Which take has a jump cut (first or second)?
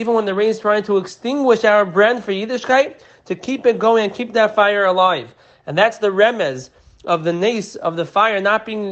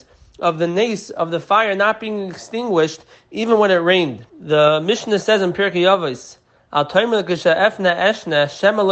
second